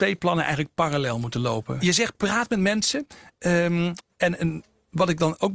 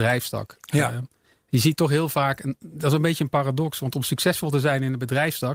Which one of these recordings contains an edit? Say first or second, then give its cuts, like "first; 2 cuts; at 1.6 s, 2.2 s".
first; 1 cut; at 1.8 s